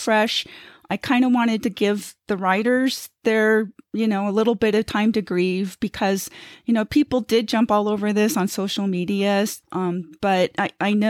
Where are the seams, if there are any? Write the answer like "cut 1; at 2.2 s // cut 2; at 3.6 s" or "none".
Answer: cut 1; at 9.6 s